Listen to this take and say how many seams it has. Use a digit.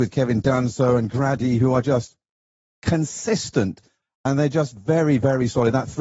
1